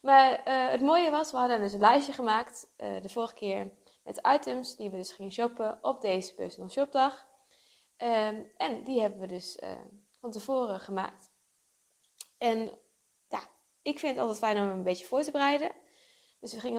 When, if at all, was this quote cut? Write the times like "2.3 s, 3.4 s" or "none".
none